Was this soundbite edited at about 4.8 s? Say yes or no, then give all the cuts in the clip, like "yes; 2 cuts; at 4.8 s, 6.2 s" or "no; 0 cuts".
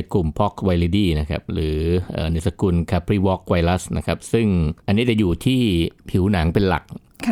yes; 1 cut; at 4.8 s